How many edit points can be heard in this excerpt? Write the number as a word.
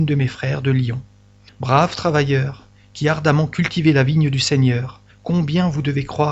zero